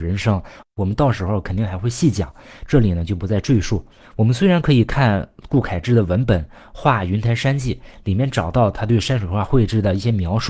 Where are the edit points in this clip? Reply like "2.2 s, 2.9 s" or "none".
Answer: 4.0 s